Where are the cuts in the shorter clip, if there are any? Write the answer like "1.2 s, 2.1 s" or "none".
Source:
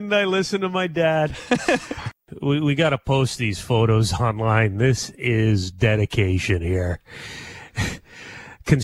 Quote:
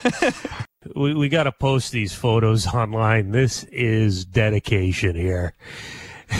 none